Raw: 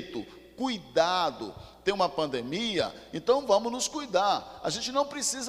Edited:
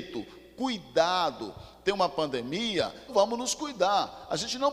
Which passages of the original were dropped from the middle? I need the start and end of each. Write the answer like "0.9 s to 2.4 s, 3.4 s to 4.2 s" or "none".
3.1 s to 3.4 s